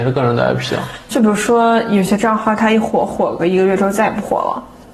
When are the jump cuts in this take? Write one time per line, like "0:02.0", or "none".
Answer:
none